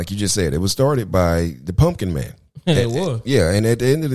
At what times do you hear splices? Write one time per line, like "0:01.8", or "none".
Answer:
0:02.5